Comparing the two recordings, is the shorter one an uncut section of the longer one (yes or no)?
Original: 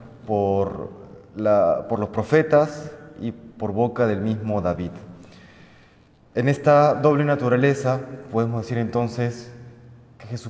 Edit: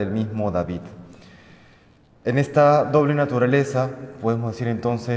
yes